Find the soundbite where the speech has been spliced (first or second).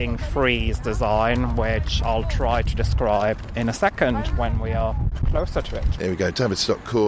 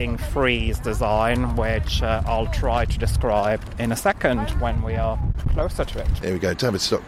first